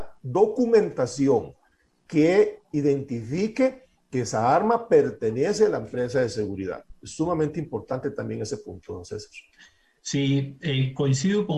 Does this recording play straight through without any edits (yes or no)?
yes